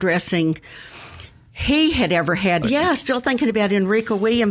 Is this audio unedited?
no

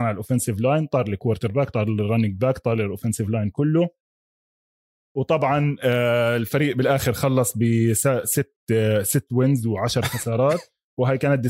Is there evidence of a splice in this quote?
no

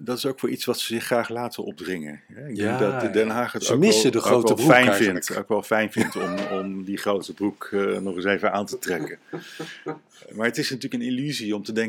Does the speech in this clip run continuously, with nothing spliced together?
yes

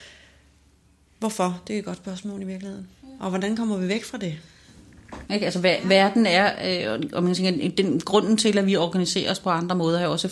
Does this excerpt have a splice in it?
yes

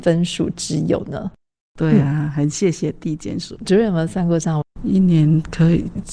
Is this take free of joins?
no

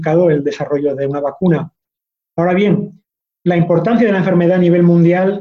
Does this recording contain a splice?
no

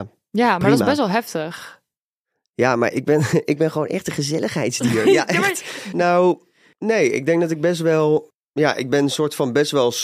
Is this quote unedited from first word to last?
no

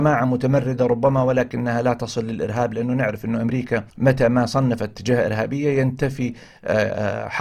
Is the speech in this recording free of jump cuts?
no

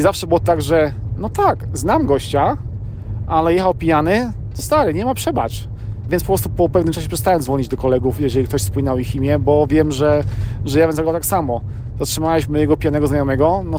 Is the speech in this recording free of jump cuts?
no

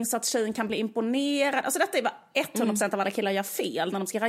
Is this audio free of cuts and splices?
yes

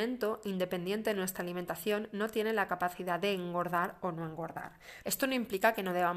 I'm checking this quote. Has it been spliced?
yes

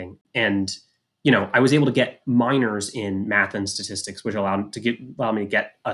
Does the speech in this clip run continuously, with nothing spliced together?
yes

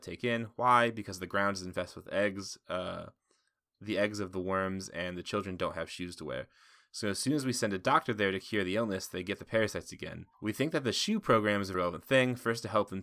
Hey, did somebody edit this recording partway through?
yes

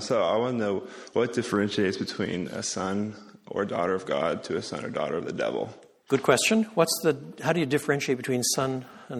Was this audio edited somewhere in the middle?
no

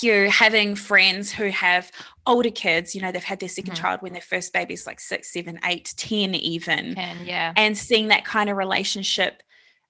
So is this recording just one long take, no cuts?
yes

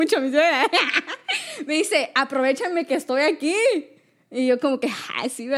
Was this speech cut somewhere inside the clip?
no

